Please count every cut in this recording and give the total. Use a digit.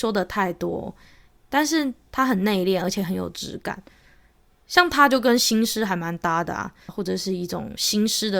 1